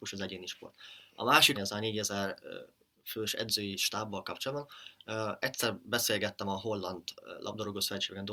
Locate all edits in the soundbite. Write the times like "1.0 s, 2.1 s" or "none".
1.5 s